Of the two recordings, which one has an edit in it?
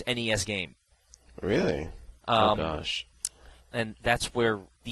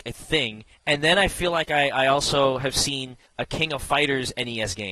first; 1 cut; at 2.2 s

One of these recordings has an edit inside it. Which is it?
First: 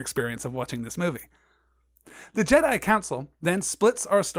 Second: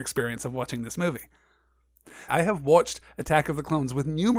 second; 1 cut; at 2.3 s

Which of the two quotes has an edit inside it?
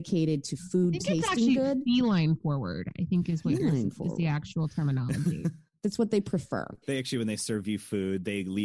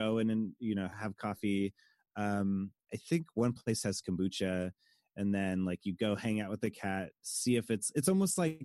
first; 1 cut; at 6.8 s

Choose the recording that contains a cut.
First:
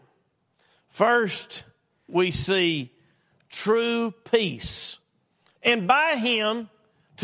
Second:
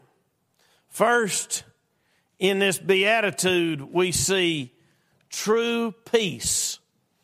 first; 2 cuts; at 2.1 s, 5.6 s

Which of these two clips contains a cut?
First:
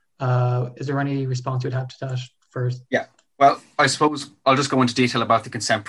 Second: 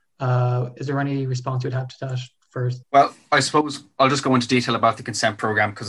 second; 1 cut; at 2.8 s

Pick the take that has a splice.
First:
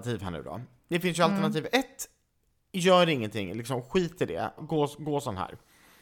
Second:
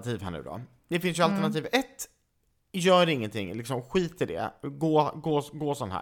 first; 1 cut; at 4.6 s

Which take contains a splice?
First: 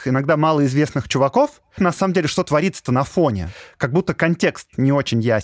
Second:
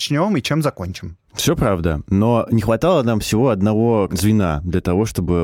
first; 1 cut; at 1.8 s

